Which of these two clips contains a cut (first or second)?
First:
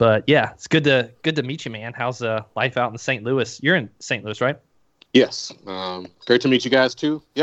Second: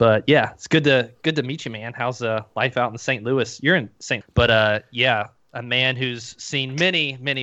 second